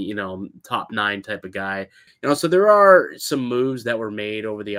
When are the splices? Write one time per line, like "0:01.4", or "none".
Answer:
0:02.1